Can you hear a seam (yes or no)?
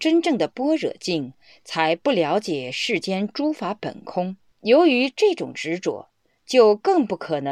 yes